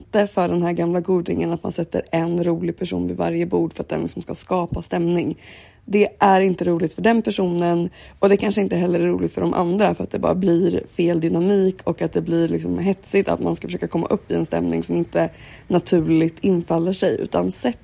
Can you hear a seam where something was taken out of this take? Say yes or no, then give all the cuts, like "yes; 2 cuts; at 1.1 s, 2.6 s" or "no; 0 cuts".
no; 0 cuts